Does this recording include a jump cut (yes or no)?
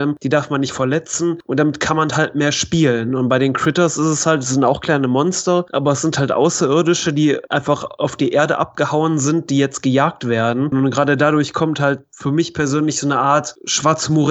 yes